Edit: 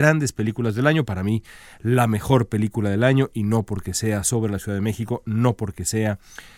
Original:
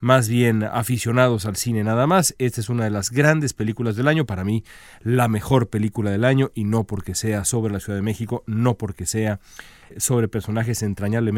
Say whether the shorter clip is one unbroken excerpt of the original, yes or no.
yes